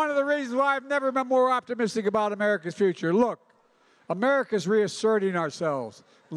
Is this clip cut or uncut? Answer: uncut